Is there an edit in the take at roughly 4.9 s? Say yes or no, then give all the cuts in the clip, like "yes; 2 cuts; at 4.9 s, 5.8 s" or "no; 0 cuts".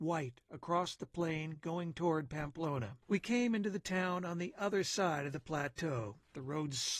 no; 1 cut; at 3.0 s